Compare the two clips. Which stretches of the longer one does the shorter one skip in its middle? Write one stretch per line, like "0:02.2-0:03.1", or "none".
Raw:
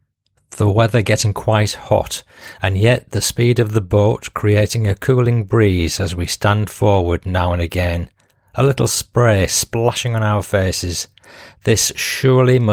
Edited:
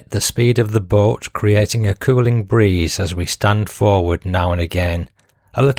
none